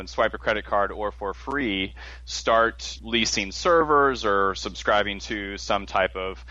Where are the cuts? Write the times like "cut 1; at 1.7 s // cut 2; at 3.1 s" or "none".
cut 1; at 3.0 s